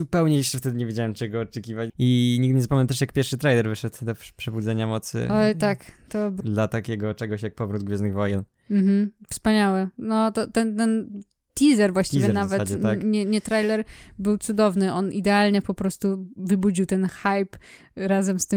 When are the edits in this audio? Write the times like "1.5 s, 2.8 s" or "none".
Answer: 1.9 s, 6.4 s